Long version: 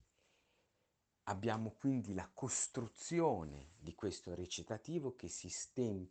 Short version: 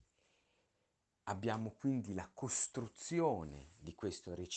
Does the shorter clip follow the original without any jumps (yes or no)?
yes